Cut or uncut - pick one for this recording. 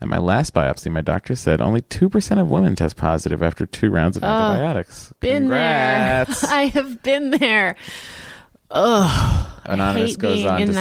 uncut